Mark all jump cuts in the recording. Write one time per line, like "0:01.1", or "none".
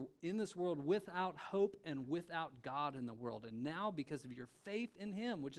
none